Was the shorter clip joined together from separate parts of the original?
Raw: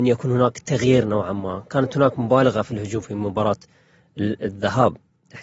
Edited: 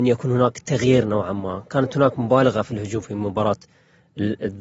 no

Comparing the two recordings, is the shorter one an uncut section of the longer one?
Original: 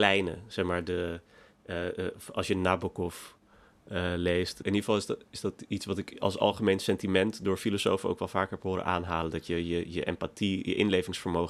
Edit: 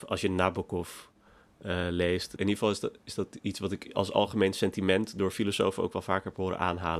yes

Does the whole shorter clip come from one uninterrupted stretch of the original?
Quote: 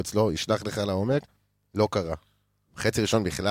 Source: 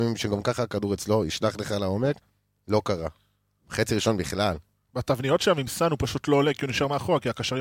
yes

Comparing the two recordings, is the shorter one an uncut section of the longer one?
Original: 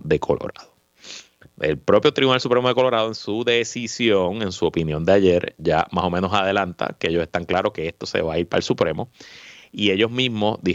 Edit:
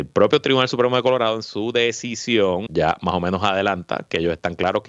no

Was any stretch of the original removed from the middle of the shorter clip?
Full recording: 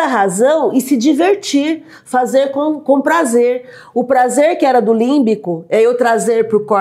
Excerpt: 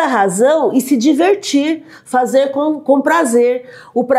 no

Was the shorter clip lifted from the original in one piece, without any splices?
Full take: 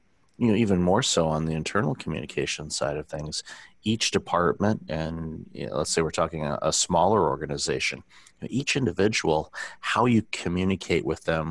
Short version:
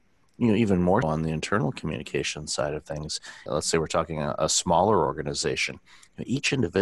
no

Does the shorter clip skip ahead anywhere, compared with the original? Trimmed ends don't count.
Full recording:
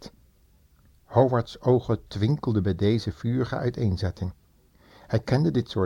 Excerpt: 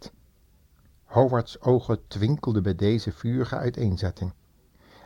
no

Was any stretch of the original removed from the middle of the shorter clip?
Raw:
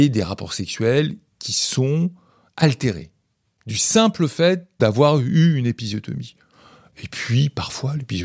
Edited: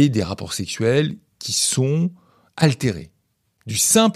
no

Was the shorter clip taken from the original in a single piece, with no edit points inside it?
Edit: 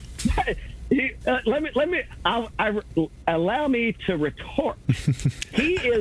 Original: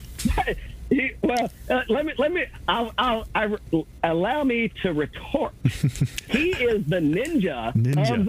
no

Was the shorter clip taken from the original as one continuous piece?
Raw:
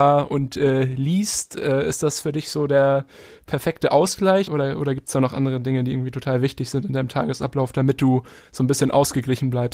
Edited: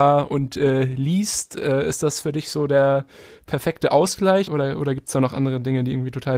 yes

